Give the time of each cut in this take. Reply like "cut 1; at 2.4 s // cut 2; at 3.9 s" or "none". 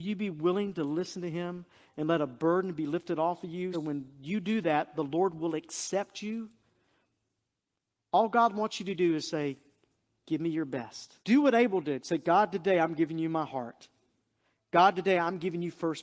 cut 1; at 3.7 s // cut 2; at 11.2 s